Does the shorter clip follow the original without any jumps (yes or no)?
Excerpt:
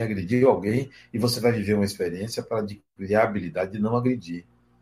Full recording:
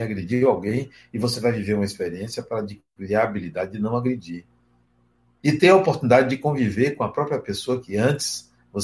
yes